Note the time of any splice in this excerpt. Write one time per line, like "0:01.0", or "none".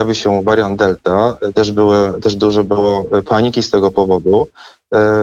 0:01.5